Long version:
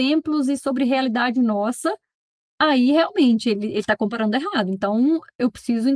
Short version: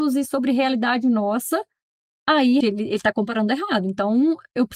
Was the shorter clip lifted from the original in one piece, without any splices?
no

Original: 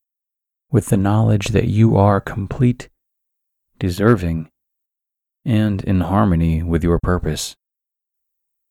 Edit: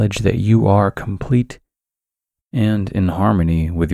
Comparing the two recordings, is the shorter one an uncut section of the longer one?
no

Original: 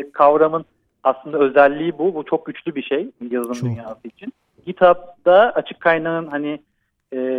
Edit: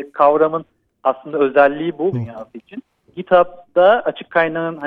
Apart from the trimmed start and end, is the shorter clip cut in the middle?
yes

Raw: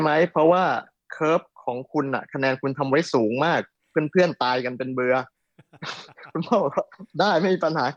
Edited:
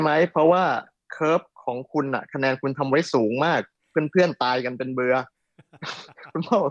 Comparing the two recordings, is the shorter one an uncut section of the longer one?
yes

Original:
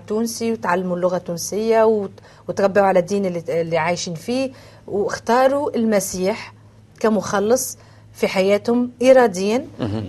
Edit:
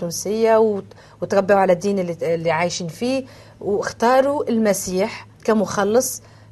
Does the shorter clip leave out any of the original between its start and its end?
yes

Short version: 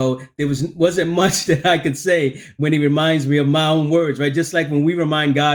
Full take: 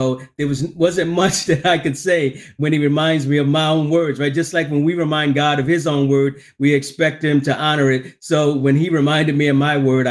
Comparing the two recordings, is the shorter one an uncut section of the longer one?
yes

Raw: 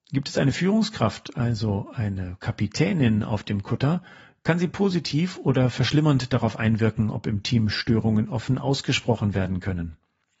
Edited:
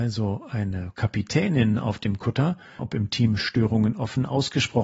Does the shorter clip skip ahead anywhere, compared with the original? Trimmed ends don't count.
yes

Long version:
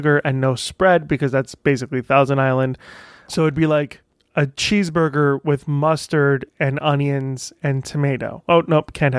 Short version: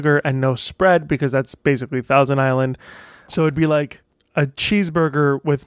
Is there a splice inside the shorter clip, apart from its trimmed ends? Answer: no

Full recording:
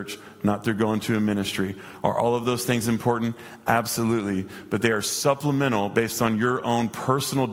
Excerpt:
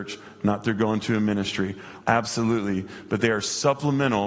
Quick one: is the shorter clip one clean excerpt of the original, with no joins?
no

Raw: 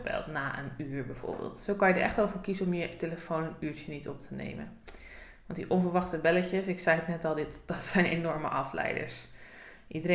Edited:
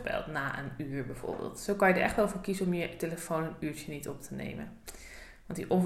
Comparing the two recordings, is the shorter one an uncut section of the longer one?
yes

